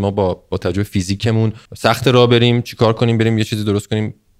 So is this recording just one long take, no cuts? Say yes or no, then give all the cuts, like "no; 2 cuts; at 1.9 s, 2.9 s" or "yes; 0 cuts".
no; 1 cut; at 1.7 s